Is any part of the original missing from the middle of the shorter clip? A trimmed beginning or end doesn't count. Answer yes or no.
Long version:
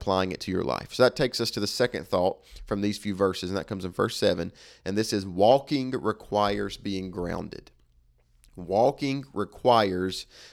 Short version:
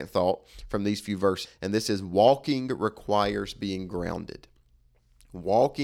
yes